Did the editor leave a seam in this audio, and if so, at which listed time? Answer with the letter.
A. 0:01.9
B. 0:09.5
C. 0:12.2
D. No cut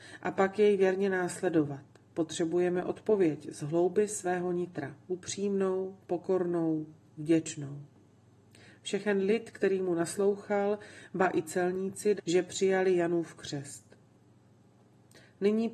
C